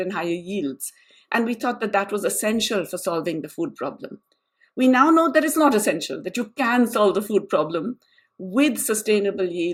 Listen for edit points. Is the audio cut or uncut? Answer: uncut